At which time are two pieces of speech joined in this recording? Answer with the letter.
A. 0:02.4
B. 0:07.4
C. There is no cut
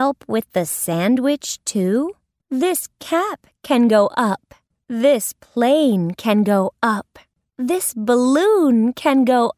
A